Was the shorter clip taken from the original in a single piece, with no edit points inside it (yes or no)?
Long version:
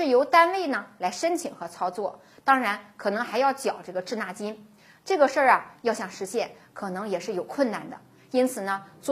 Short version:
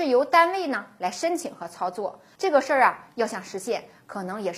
no